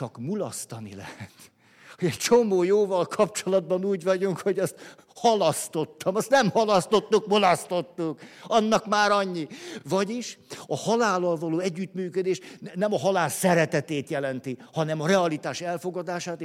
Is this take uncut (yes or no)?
yes